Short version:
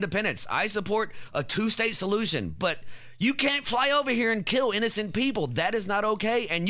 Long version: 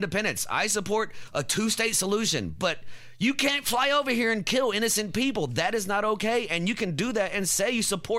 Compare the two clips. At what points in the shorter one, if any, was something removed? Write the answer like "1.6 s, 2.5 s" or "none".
none